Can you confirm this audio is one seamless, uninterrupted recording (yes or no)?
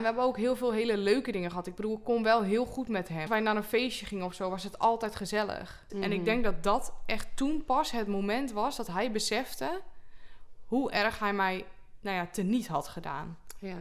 no